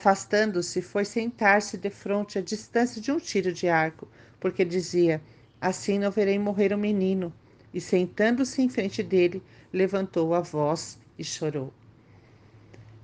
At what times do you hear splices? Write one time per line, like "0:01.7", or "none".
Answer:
none